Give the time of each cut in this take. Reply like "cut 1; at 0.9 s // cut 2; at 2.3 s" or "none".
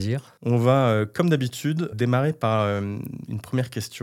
cut 1; at 1.9 s